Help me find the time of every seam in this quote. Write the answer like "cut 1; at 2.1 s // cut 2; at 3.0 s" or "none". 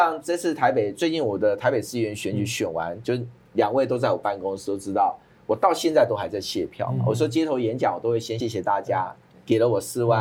cut 1; at 8.4 s